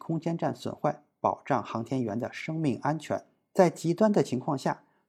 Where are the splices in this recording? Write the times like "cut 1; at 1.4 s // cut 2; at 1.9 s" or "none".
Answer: none

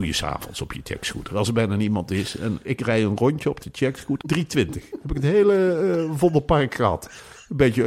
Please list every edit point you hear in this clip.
cut 1; at 4.2 s

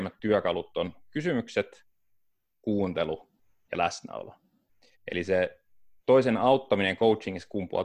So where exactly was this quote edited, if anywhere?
cut 1; at 4.9 s

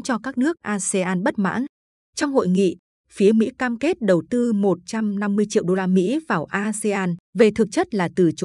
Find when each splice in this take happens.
cut 1; at 7.2 s

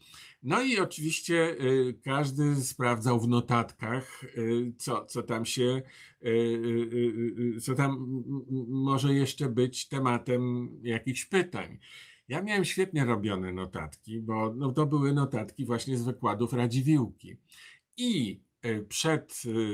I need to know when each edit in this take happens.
none

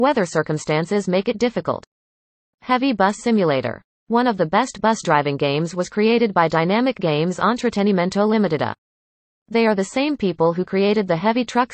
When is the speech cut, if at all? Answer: none

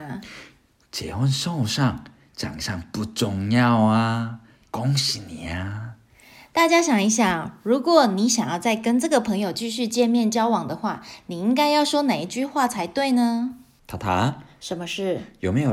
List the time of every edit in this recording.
none

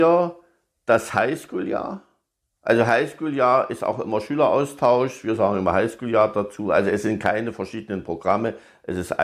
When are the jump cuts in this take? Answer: none

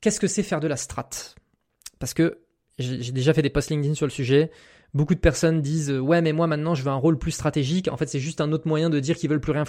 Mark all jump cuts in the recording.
none

